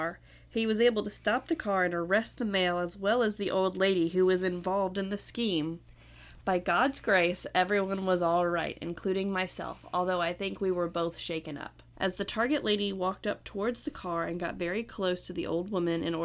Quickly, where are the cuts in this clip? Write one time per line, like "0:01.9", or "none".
0:11.9